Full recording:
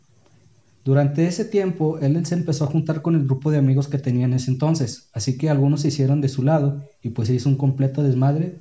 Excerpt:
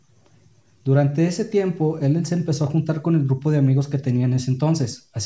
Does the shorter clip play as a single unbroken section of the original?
yes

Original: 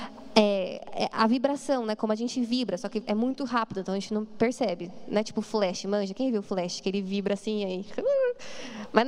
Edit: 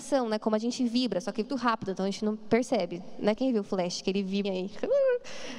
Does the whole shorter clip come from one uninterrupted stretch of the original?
no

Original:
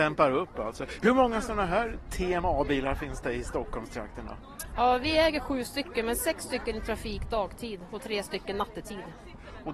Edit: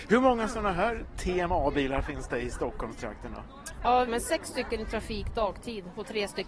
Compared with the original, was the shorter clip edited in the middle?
yes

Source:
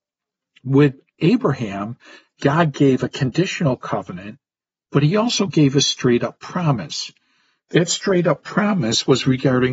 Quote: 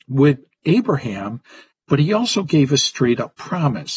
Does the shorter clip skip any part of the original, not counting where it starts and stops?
yes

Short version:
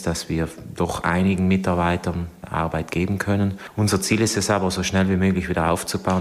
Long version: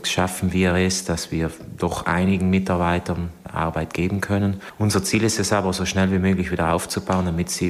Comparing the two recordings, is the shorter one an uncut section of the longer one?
yes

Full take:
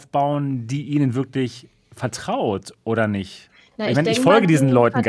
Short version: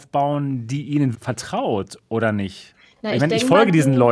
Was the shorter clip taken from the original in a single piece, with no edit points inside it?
no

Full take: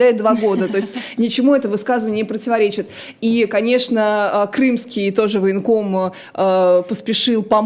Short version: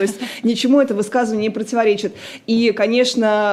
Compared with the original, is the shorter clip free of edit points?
yes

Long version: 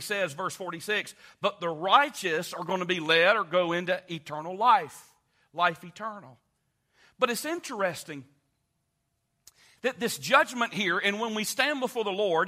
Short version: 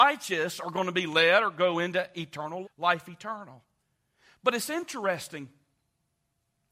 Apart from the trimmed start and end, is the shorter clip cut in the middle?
yes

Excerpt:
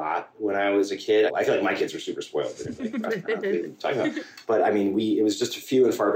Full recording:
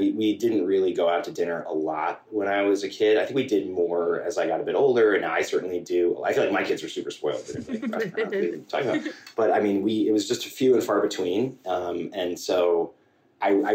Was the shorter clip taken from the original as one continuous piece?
no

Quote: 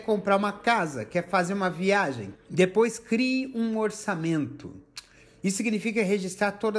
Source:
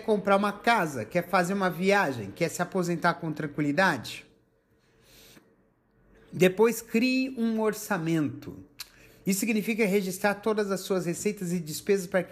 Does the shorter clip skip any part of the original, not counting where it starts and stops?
yes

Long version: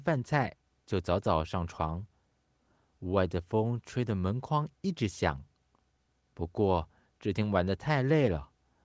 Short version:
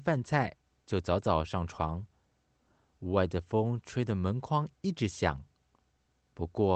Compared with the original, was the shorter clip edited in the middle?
no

